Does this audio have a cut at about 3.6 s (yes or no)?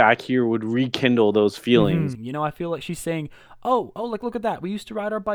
no